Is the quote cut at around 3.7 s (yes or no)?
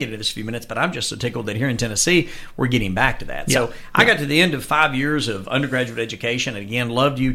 no